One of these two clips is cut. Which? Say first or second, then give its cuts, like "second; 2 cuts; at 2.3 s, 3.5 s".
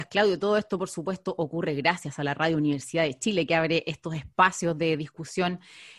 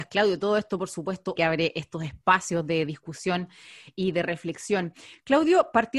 second; 1 cut; at 1.4 s